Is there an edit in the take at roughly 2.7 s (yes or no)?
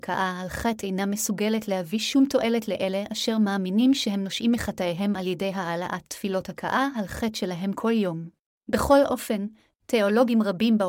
no